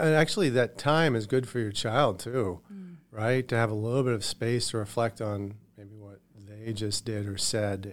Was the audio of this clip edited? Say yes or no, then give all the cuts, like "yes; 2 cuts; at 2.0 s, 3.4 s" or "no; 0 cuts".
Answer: no; 0 cuts